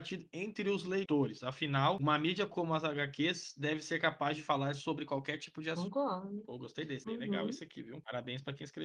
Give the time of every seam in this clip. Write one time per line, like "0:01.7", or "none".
none